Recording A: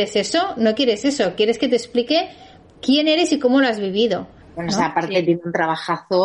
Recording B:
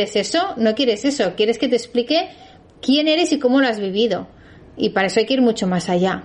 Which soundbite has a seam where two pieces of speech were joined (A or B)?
A